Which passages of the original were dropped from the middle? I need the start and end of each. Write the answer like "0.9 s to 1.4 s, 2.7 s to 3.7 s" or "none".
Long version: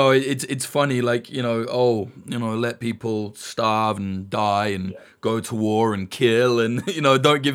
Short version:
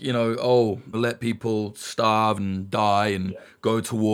2.2 s to 2.5 s